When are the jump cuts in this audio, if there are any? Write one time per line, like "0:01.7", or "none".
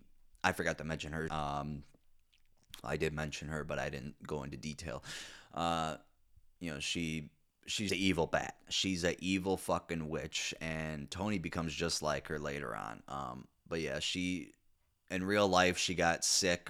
0:01.3
0:07.9